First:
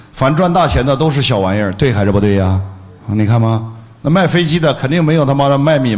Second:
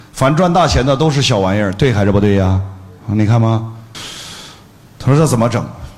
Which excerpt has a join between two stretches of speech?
second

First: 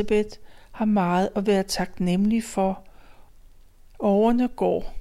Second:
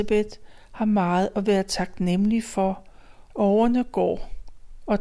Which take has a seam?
second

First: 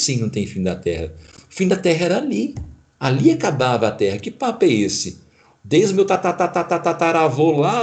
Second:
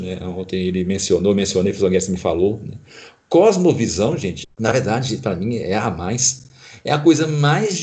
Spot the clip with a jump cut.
second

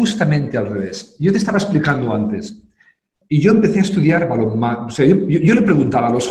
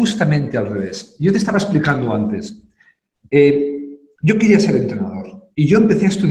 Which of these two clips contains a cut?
first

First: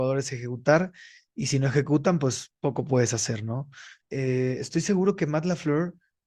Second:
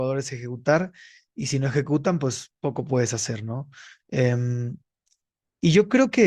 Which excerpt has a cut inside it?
first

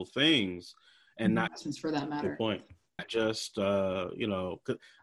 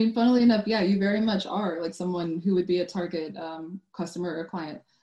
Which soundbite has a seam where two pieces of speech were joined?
first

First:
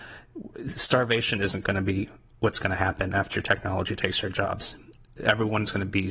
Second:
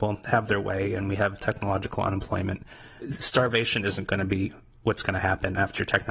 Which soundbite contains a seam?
second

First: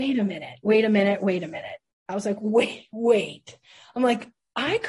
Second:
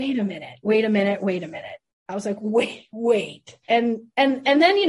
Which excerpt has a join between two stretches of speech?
second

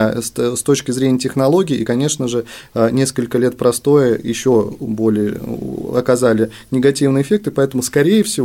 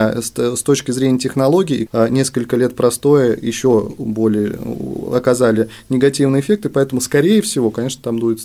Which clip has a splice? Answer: second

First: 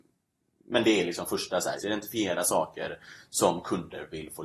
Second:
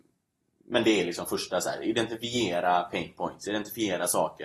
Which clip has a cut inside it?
first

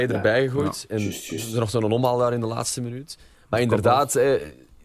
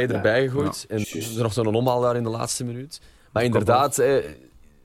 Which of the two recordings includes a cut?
second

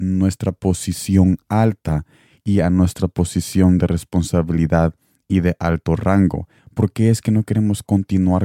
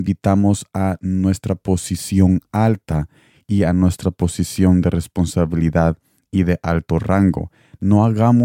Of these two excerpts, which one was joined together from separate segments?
first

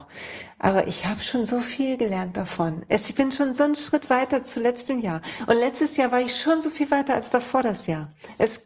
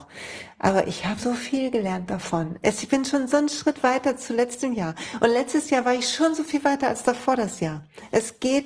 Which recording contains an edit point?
second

